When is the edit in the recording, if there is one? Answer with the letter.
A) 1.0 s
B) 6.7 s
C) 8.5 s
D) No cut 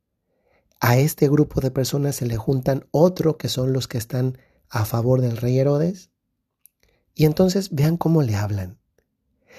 D